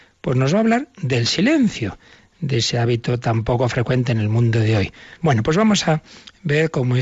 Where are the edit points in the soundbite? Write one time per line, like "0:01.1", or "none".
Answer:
0:05.2